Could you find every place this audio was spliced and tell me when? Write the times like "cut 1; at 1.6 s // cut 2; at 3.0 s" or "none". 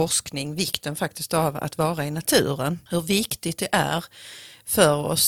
cut 1; at 2.9 s